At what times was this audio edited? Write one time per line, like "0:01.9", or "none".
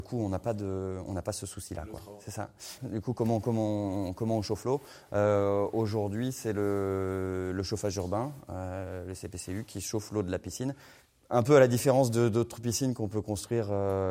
0:02.8